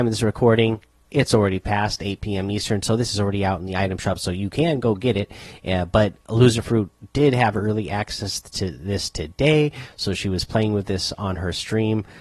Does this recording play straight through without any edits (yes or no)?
yes